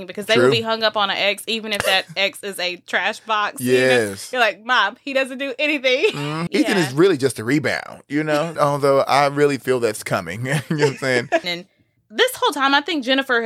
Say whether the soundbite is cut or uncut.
cut